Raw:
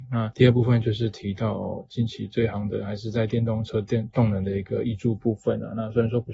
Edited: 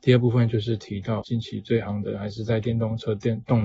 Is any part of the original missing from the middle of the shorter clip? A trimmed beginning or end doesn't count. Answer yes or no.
yes